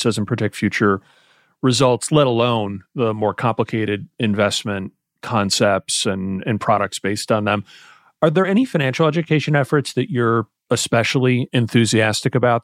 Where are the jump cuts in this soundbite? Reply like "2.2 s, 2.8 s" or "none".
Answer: none